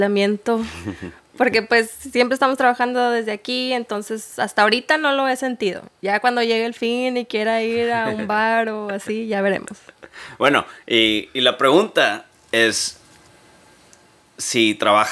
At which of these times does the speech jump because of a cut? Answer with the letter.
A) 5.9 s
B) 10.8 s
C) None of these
C